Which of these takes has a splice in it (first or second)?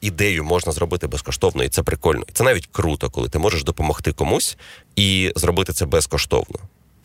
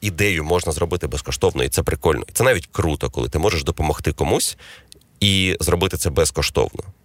first